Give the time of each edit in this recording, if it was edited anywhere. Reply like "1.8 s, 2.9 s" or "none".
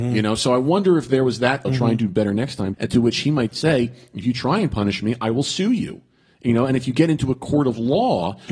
1.6 s, 2.7 s